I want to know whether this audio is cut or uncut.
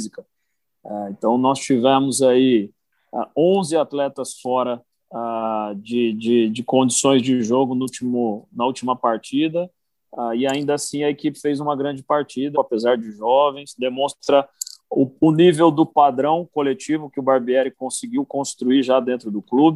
cut